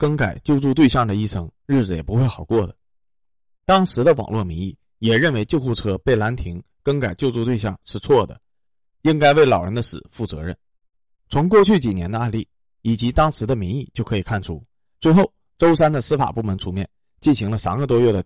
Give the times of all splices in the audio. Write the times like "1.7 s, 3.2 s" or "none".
11.2 s, 14.9 s